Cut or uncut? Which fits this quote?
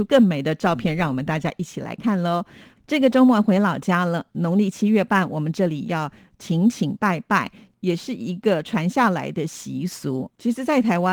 uncut